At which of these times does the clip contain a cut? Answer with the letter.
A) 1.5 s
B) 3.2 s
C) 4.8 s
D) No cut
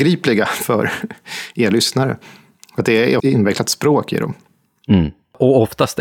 B